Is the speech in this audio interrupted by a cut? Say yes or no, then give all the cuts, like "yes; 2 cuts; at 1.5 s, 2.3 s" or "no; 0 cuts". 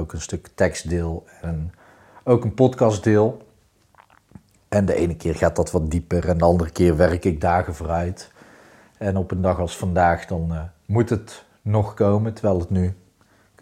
no; 0 cuts